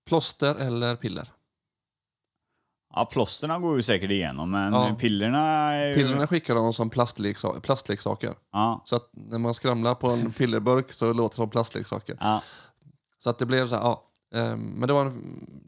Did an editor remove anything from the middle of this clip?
no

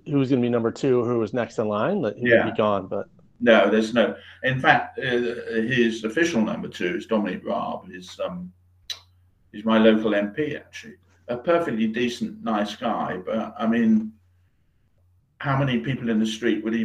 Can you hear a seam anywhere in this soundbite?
no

